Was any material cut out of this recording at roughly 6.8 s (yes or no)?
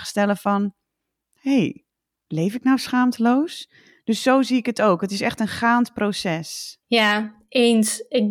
yes